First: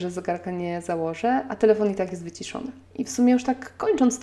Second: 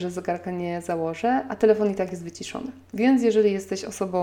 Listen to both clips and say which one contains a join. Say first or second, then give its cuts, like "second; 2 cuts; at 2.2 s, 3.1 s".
first; 1 cut; at 2.9 s